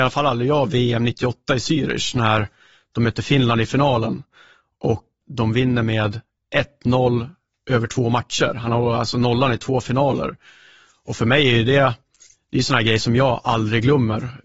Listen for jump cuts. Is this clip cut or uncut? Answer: cut